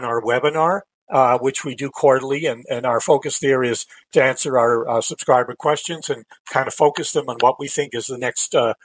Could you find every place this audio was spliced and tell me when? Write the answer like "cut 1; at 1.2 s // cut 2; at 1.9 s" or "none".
none